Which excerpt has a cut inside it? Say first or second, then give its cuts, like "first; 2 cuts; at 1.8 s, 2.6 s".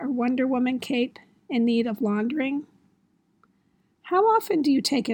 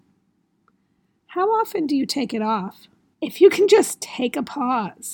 second; 1 cut; at 3.1 s